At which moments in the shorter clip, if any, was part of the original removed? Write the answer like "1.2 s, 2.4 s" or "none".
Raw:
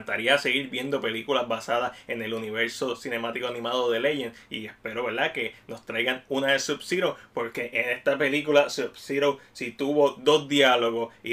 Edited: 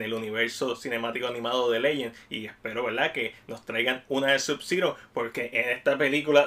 none